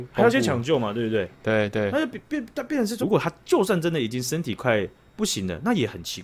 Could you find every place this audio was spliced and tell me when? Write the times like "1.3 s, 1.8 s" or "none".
3.0 s